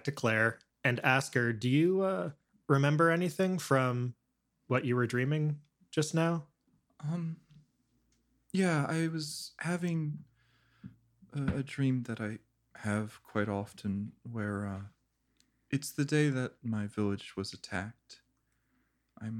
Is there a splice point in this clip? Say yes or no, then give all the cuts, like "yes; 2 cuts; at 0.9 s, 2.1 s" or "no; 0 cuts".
no; 0 cuts